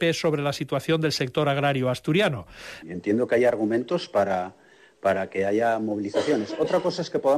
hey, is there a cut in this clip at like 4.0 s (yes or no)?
no